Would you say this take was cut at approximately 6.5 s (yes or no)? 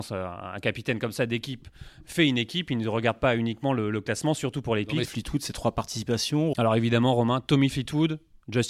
yes